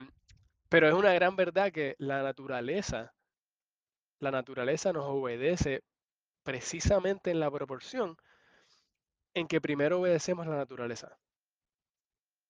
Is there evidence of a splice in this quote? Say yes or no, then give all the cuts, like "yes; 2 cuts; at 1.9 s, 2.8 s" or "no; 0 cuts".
no; 0 cuts